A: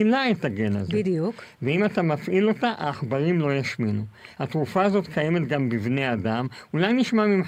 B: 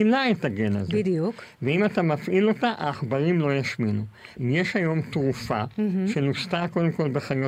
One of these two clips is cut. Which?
B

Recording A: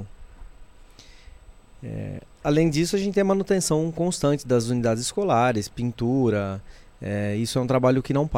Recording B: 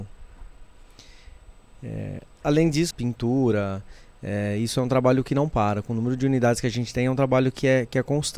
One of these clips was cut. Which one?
B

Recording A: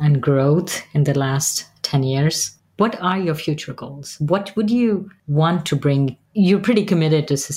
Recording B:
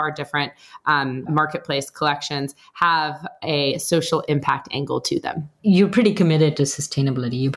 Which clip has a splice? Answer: B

